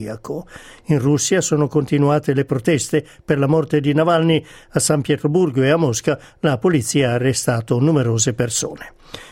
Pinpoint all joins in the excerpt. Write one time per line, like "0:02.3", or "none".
none